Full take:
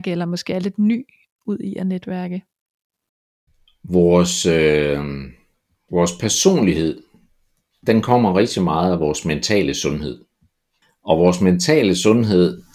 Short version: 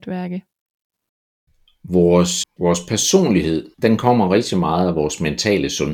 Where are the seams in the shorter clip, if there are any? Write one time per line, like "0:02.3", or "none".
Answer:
0:02.4
0:03.7